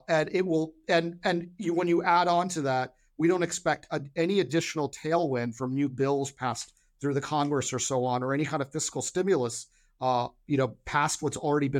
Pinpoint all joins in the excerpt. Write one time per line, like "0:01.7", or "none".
none

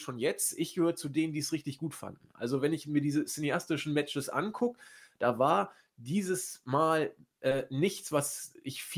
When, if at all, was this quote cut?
none

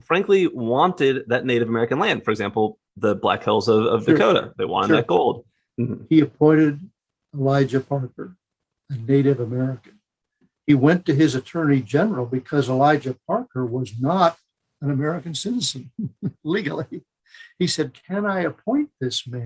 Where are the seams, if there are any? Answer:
0:05.7

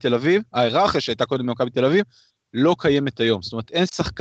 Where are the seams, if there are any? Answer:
none

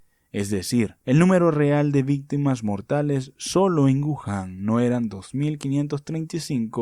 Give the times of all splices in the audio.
0:01.0

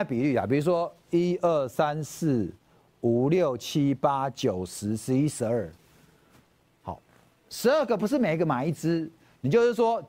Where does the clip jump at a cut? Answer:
none

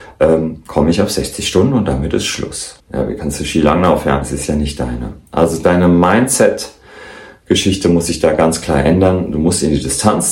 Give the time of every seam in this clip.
0:02.8
0:04.2

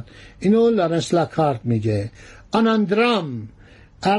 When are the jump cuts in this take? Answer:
none

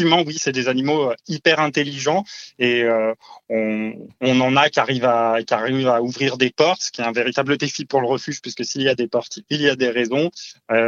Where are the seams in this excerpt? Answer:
none

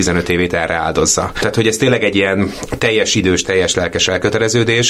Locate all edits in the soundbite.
0:01.3
0:03.4

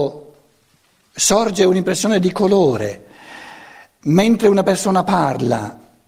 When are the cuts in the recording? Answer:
none

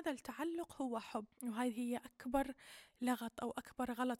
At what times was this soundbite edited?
0:01.3

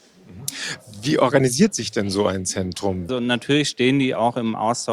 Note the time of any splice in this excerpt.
0:03.1

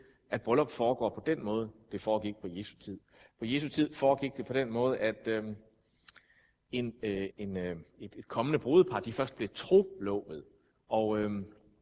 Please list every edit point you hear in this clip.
0:07.3
0:10.7

